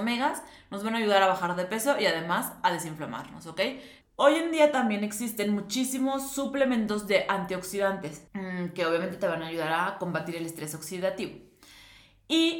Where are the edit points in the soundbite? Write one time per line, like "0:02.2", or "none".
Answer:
0:04.0
0:08.3